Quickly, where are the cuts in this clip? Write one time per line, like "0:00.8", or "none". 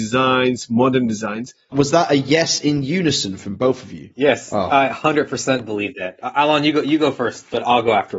0:01.7